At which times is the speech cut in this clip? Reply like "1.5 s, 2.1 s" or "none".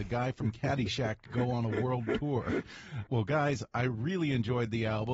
3.1 s